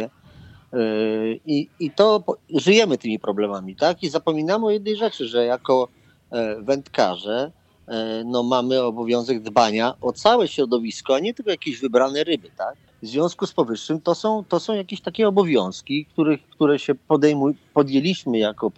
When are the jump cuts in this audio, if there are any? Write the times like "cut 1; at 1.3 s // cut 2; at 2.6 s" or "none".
cut 1; at 12.9 s